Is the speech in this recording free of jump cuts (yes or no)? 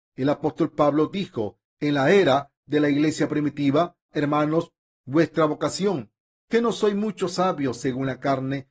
no